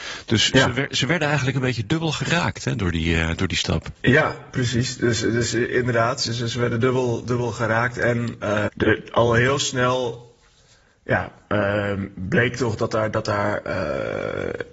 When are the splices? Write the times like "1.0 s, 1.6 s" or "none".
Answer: 4.0 s, 8.7 s